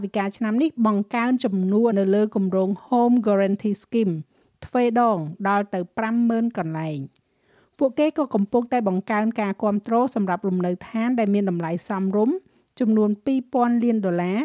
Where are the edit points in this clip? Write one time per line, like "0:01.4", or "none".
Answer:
0:01.9